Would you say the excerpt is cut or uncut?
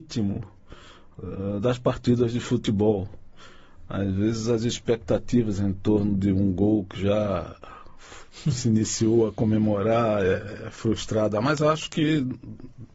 uncut